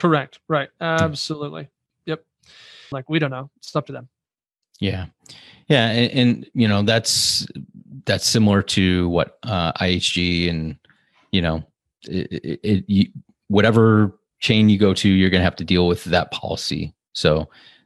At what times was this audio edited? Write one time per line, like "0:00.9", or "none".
0:02.9